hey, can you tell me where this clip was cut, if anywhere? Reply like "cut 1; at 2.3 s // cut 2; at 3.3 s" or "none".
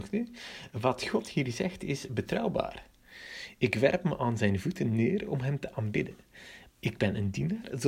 cut 1; at 6.7 s